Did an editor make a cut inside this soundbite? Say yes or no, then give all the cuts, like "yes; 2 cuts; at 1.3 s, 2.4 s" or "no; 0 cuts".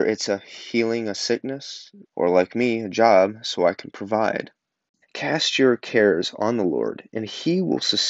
yes; 2 cuts; at 2.0 s, 5.0 s